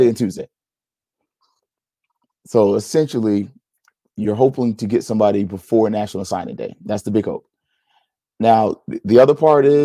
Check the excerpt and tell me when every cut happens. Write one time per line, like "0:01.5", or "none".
none